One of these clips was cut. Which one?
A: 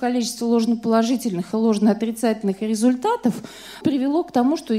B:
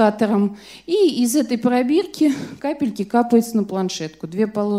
A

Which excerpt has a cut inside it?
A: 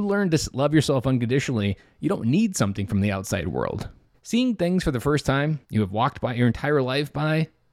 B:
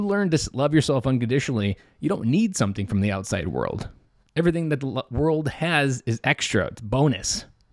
A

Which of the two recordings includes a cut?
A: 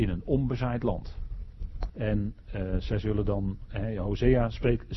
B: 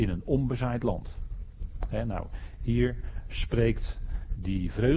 A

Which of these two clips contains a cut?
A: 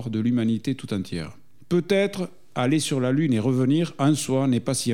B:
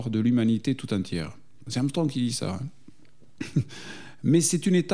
B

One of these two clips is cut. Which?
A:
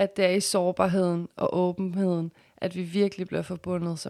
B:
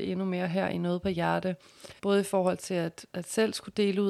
B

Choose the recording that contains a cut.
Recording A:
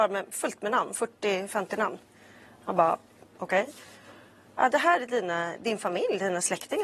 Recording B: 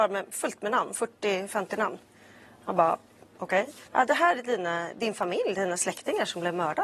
B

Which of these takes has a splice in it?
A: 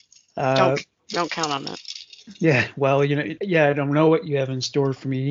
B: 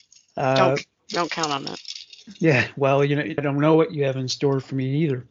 B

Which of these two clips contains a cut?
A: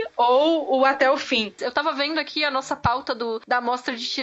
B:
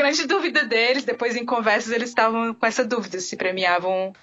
A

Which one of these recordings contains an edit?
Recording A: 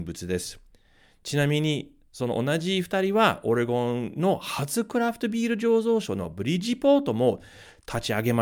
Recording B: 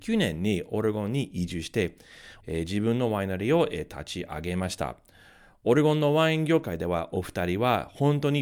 B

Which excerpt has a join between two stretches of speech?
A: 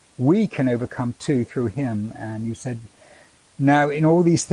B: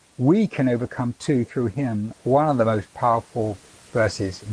B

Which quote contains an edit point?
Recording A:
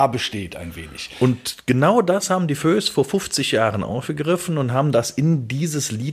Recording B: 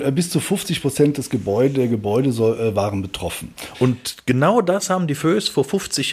B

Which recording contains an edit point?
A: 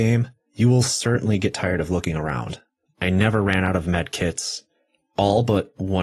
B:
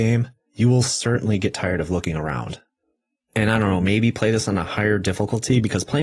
A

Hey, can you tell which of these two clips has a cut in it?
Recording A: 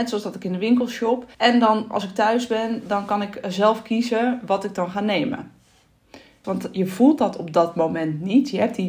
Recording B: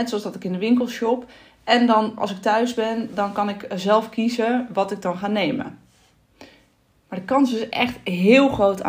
A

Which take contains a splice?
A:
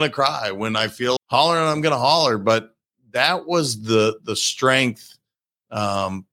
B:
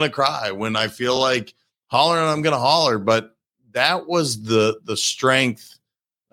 A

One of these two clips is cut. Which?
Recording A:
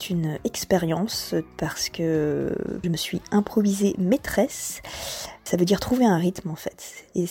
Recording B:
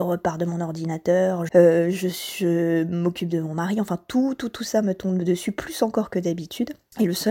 B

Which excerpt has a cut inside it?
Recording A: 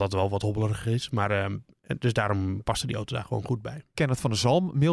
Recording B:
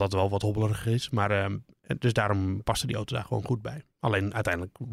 A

